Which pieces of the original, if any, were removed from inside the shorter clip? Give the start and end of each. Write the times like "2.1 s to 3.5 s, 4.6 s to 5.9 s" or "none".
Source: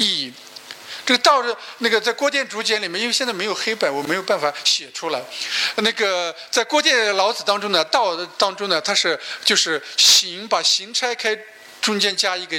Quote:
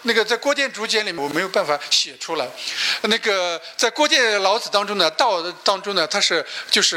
2.9 s to 3.9 s